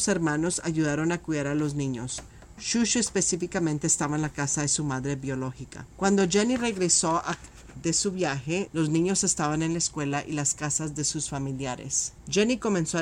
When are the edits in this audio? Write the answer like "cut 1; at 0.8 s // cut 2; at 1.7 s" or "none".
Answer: cut 1; at 8.7 s